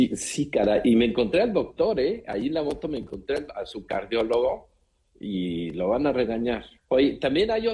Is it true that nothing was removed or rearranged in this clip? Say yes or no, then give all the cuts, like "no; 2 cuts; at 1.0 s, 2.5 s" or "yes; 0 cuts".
no; 1 cut; at 6.8 s